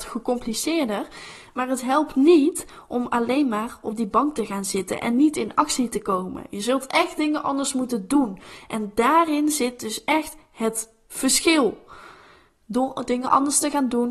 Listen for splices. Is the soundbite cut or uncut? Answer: uncut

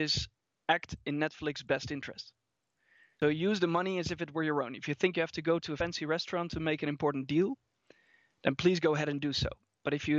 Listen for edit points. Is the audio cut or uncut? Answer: uncut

